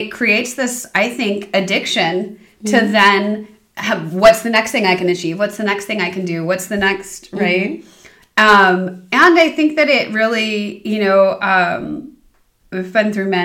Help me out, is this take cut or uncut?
uncut